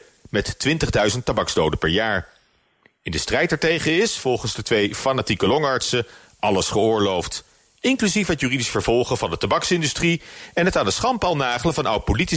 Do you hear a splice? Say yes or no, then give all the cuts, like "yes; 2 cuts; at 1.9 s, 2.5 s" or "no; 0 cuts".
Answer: no; 0 cuts